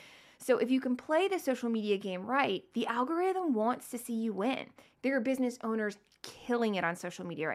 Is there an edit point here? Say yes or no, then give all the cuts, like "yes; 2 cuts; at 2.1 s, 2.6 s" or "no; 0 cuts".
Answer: no; 0 cuts